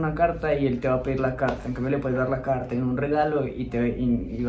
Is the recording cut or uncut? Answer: uncut